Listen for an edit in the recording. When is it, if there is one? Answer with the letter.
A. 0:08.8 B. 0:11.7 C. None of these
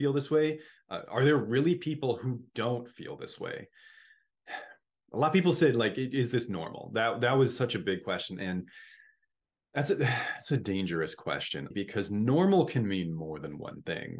B